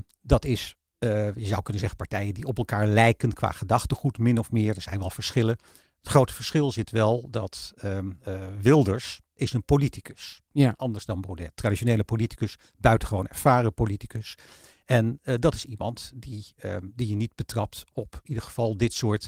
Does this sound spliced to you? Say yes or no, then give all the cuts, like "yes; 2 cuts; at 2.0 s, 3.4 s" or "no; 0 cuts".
no; 0 cuts